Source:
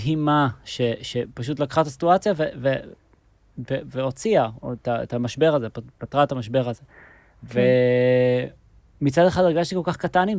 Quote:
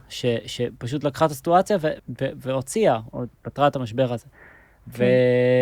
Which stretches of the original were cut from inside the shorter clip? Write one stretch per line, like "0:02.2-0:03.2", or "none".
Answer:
0:02.5-0:03.5
0:04.8-0:05.9

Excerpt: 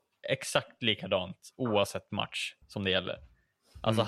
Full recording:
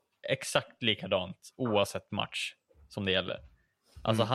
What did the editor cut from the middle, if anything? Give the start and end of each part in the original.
0:02.6-0:02.8

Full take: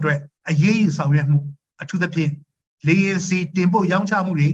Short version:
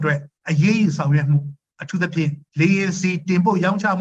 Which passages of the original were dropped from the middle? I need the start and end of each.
0:02.5-0:02.8

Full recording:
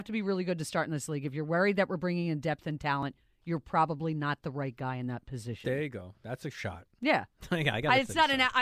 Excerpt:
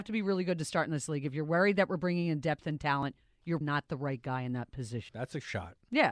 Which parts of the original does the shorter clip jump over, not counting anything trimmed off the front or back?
0:03.6-0:04.1
0:05.6-0:06.2

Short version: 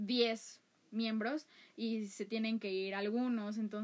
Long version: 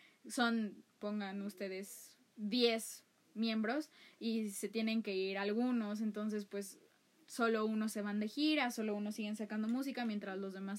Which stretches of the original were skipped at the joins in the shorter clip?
none

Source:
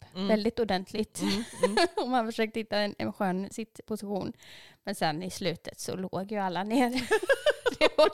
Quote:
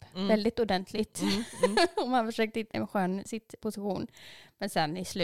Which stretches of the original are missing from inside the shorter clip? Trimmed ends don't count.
0:02.7-0:03.0

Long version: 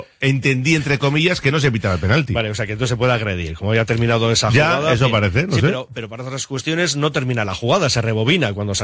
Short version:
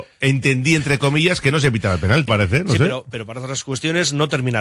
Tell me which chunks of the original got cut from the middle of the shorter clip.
0:02.3-0:05.1

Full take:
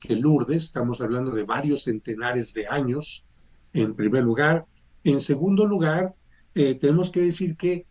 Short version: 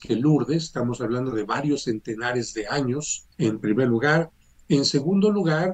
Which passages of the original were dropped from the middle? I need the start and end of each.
0:03.3-0:03.7

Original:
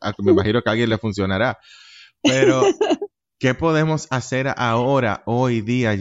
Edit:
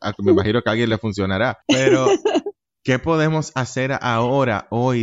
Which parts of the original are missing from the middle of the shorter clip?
0:01.6-0:02.2

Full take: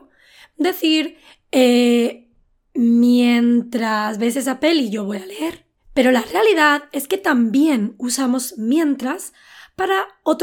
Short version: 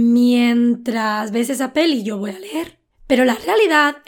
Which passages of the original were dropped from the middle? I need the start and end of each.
none

